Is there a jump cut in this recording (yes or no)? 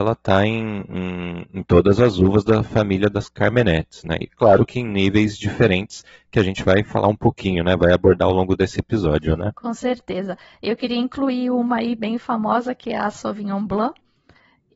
yes